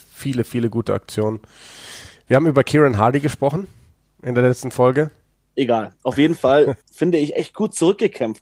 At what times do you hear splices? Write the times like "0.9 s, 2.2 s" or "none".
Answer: 5.3 s, 6.8 s